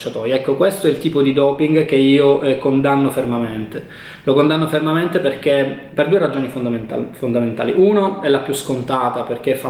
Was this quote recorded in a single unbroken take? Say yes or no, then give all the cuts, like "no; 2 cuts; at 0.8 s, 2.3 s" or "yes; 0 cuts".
yes; 0 cuts